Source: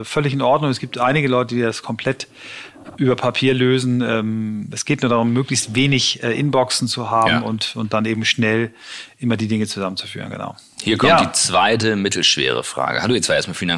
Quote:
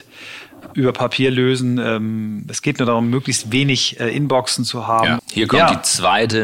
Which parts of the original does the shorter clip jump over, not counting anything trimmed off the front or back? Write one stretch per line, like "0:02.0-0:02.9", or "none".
0:07.4-0:10.7